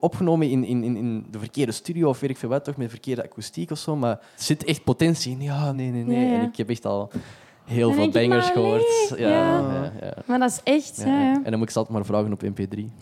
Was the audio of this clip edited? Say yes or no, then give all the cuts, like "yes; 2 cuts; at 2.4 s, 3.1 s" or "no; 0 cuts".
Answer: yes; 2 cuts; at 4.4 s, 5.7 s